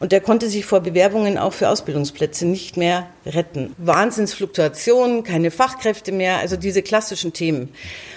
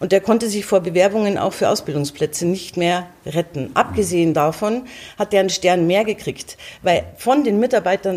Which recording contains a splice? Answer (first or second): first